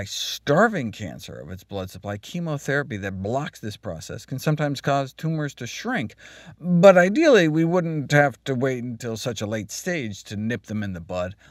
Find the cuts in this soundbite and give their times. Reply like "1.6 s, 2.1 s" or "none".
none